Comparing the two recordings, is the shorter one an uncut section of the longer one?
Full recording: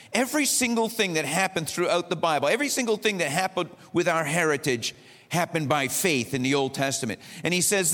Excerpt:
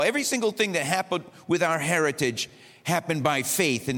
yes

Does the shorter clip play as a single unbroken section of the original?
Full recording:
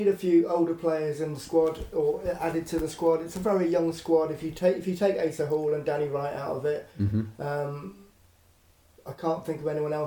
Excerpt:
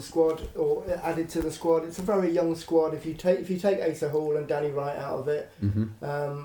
yes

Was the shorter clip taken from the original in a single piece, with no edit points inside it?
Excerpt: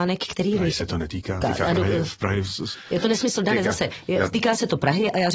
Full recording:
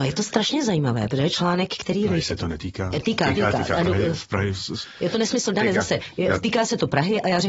no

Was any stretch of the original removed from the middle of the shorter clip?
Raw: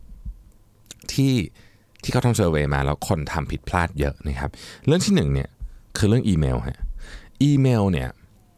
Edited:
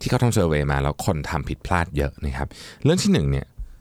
no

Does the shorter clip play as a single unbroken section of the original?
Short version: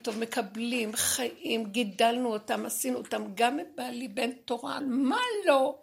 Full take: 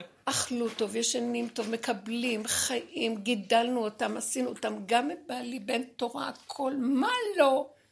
no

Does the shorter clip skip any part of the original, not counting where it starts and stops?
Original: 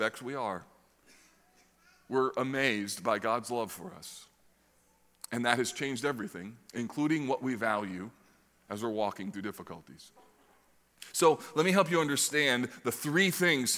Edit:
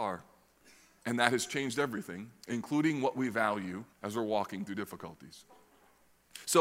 yes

